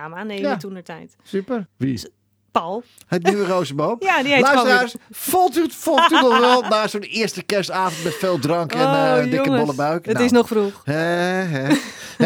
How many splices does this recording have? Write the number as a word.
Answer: one